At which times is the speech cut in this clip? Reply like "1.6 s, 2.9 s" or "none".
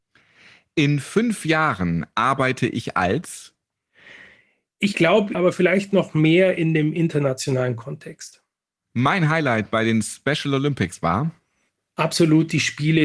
5.3 s

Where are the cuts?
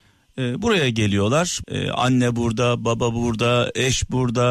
1.6 s

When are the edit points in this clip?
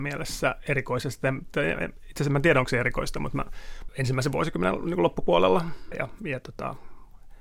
3.9 s, 5.9 s

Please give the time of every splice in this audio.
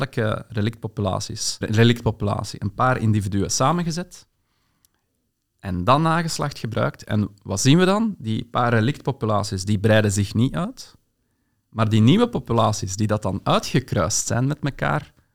1.6 s

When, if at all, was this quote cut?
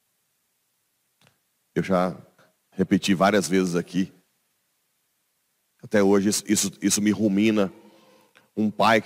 none

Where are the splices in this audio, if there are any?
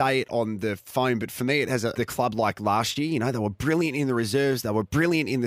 1.9 s

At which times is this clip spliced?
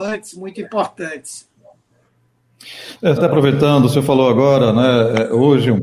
3.2 s

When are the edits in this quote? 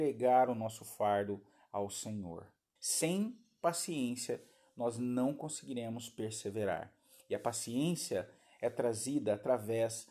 2.8 s

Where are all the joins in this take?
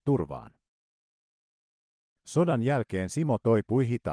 none

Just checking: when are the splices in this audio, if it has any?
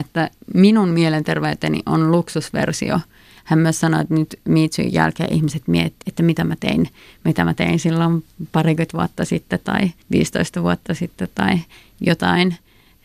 3.4 s, 6.0 s, 10.0 s

